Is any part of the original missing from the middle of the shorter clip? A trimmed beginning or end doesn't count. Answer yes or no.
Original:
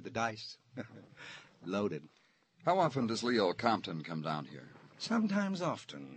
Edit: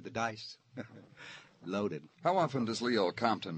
yes